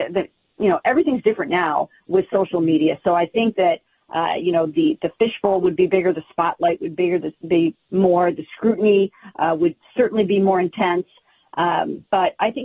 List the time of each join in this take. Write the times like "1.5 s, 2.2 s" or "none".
none